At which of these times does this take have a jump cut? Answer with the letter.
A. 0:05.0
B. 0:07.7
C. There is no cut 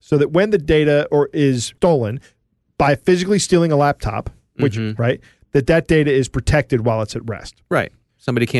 A